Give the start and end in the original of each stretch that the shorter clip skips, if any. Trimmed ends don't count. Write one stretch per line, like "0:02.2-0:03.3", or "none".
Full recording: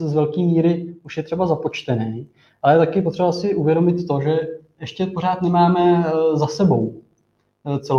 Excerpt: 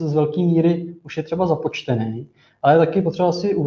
none